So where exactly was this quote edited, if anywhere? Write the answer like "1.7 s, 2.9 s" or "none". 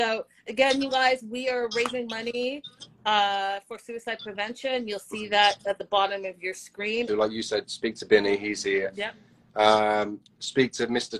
7.1 s